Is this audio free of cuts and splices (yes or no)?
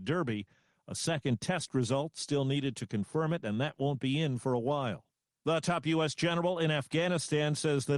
yes